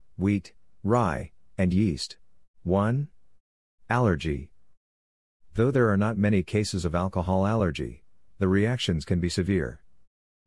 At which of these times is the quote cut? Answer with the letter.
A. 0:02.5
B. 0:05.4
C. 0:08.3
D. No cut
A